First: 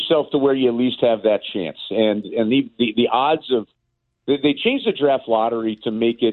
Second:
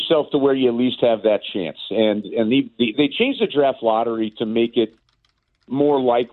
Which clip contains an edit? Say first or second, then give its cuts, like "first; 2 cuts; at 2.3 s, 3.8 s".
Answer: second; 1 cut; at 2.9 s